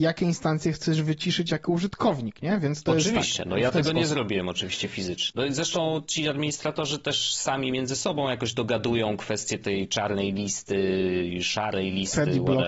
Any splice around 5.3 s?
yes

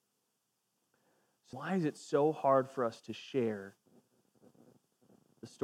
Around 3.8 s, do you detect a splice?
no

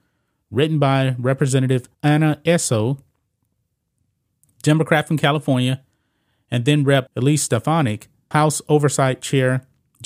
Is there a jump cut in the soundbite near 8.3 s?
yes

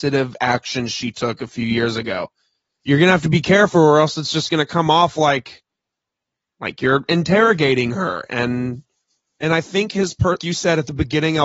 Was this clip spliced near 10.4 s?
yes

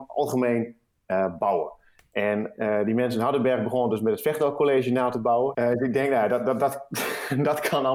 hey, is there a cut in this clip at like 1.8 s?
no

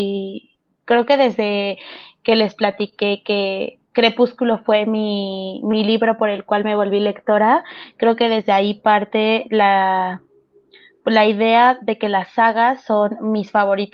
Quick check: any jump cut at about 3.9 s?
yes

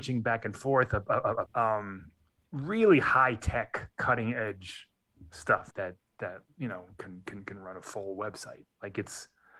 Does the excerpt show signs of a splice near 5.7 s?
yes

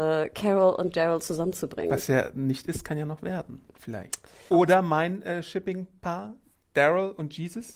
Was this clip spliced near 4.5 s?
yes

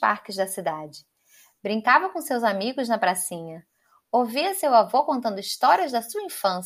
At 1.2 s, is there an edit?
no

